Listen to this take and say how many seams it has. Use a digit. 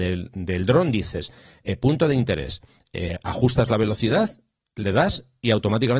0